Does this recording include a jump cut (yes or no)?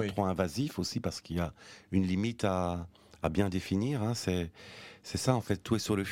no